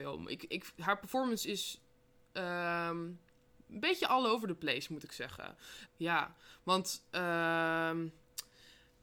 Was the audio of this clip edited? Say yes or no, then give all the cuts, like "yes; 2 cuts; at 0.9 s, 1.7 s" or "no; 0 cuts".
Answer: yes; 1 cut; at 5.9 s